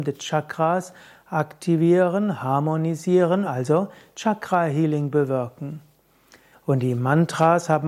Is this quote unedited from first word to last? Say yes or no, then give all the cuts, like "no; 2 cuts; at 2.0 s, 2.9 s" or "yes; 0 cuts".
no; 2 cuts; at 3.4 s, 6.5 s